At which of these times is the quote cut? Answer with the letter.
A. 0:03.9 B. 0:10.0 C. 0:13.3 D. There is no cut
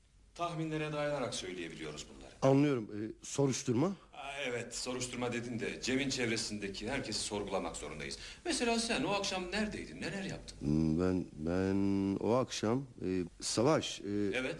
C